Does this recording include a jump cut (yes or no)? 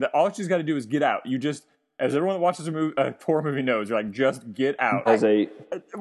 yes